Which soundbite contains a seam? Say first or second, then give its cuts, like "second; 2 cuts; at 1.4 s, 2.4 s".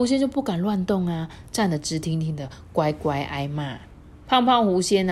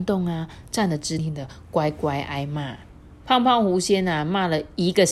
second; 1 cut; at 1.2 s